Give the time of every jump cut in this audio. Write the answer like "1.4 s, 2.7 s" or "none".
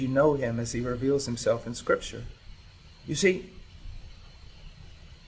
2.9 s